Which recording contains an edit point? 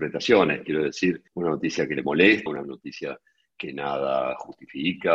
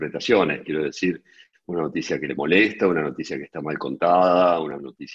first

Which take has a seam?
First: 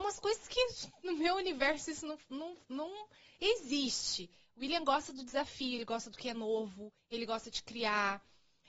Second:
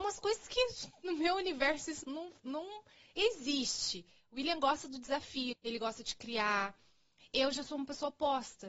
second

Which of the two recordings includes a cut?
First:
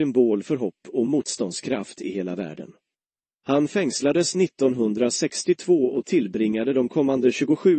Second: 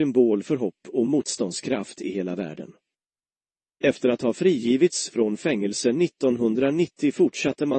first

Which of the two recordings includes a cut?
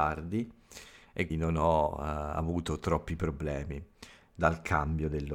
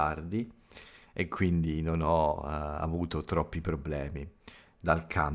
first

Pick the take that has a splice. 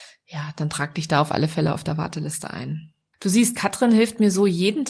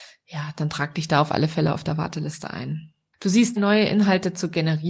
second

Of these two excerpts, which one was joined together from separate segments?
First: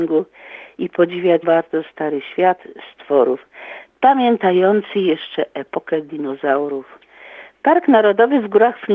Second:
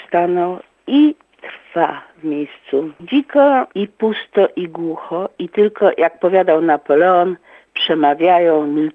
first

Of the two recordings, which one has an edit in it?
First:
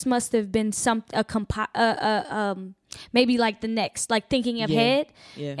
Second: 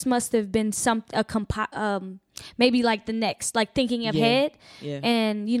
second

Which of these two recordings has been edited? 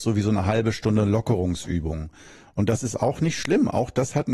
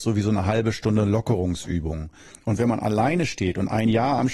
second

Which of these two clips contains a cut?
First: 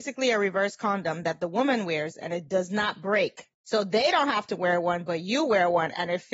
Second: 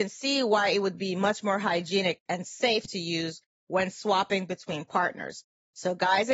first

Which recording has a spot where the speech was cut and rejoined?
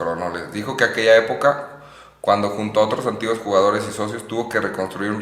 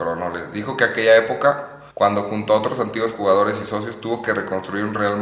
second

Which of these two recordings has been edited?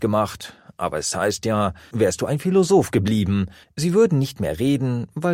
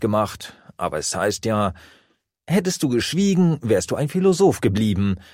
first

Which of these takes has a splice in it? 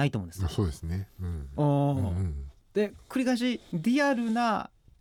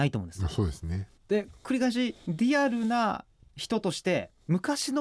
second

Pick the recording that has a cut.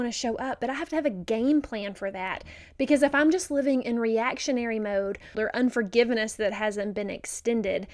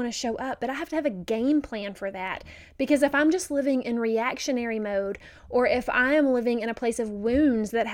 first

